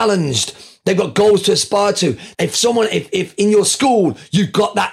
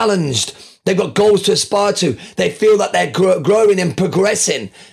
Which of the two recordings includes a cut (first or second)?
first